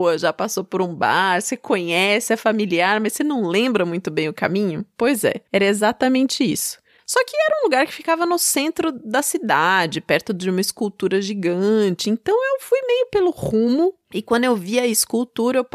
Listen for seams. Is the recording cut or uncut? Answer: uncut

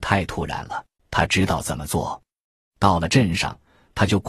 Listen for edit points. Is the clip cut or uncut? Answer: cut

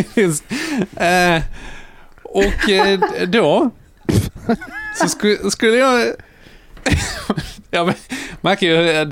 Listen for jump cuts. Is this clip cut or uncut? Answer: uncut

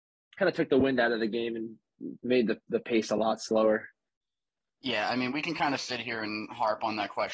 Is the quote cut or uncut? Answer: uncut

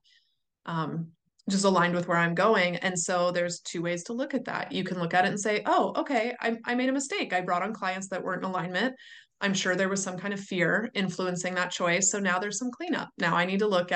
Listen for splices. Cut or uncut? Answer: uncut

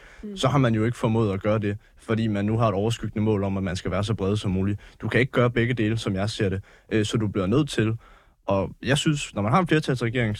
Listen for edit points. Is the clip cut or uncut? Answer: uncut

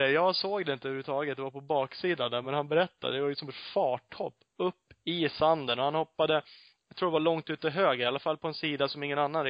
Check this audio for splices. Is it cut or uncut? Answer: uncut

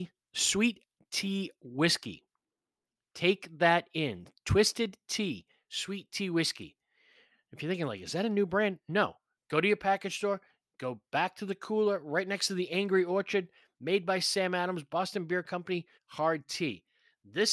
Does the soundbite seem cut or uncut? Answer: cut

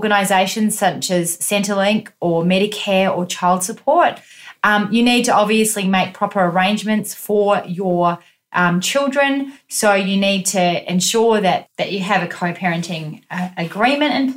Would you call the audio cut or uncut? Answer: uncut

